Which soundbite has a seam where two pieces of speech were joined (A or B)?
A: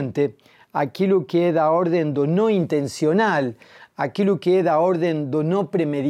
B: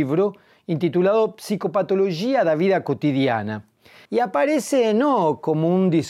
B